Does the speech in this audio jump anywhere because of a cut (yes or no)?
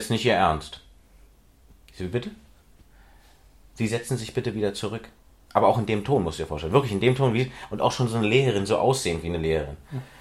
no